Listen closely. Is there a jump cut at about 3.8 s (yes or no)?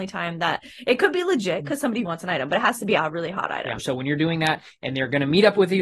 yes